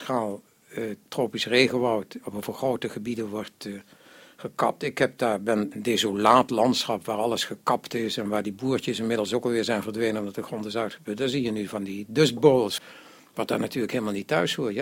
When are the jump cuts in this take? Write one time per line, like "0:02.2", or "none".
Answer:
0:05.7
0:12.8